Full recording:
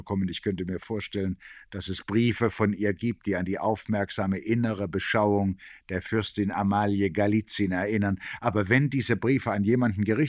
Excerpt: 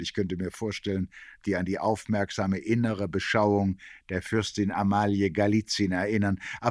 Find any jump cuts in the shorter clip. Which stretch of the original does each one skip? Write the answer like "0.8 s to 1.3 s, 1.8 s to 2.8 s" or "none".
1.7 s to 3.2 s